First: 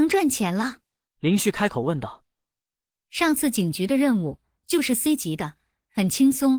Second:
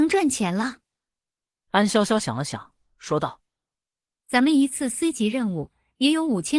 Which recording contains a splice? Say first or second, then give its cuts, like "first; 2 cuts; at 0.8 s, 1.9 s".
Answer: first; 1 cut; at 1.1 s